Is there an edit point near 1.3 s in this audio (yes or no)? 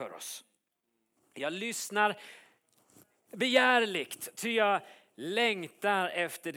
yes